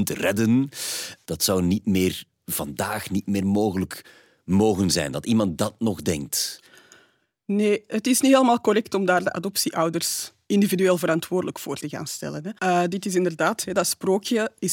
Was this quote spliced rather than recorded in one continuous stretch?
yes; 2 cuts; at 1.3 s, 12.6 s

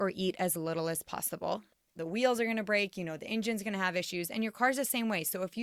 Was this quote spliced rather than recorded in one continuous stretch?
yes; 1 cut; at 2.0 s

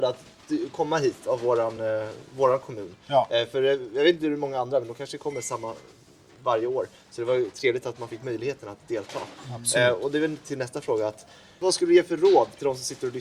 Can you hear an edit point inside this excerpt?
no; 0 cuts

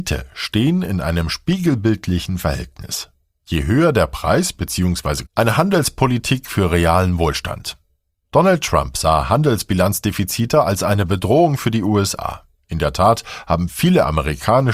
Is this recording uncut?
no; 1 cut; at 5.3 s

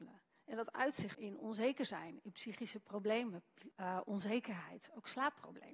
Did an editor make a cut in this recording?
yes; 2 cuts; at 1.1 s, 3.7 s

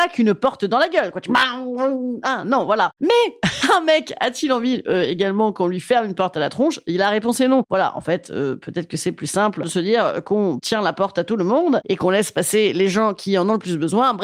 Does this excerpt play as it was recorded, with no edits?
yes; 0 cuts

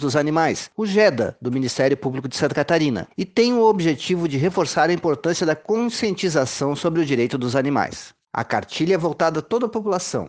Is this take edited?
no; 0 cuts

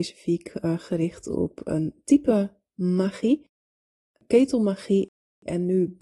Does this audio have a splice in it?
yes; 1 cut; at 4.1 s

